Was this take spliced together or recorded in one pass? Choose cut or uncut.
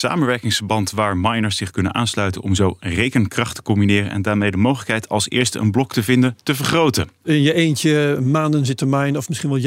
cut